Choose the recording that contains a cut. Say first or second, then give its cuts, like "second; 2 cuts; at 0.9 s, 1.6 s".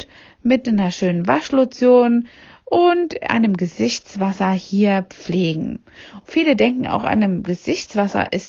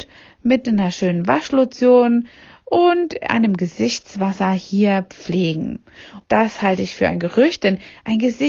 second; 1 cut; at 6.2 s